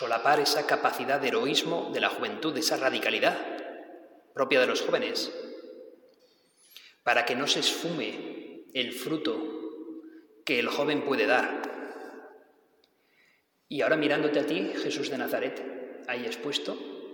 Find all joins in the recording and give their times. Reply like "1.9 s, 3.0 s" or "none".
none